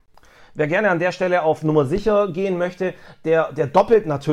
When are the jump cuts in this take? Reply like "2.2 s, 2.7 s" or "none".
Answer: none